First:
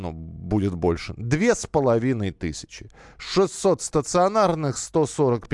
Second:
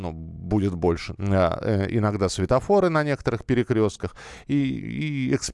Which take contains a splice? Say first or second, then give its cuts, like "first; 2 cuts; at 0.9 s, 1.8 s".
second; 2 cuts; at 1.2 s, 4.4 s